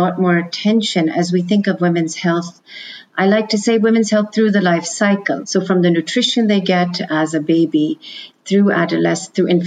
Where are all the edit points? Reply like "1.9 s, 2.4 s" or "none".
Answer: 5.4 s